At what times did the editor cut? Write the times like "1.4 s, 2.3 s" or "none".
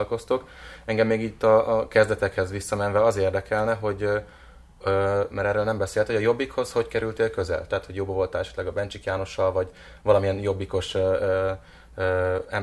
7.7 s